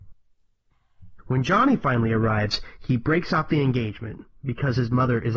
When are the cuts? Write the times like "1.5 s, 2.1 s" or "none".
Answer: 1.2 s